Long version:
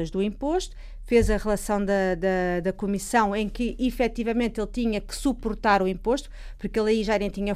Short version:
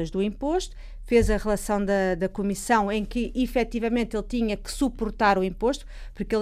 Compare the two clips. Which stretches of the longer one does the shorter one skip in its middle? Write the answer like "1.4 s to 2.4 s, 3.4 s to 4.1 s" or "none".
2.2 s to 2.6 s